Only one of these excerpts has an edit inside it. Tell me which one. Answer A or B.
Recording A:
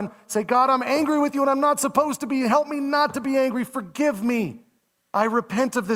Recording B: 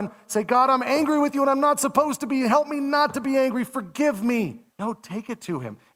B